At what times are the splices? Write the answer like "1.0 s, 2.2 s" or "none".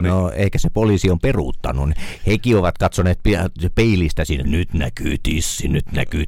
4.4 s